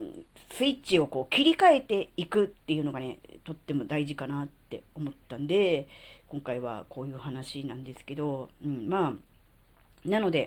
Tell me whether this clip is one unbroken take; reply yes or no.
yes